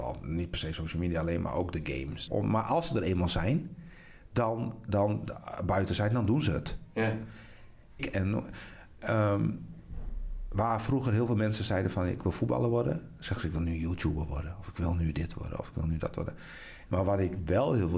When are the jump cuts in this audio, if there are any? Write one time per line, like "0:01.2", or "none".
0:02.3
0:08.0
0:16.9